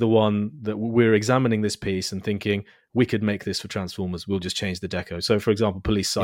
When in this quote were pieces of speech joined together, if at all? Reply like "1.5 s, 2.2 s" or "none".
none

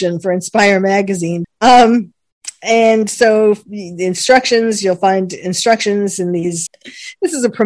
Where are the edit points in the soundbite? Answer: 1.4 s, 6.7 s

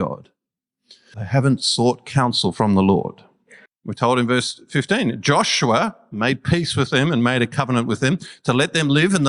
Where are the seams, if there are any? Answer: 1.1 s, 3.7 s

